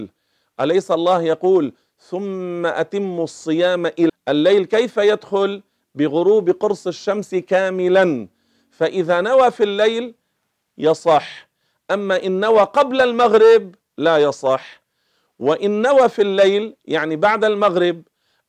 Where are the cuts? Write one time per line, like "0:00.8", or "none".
0:04.1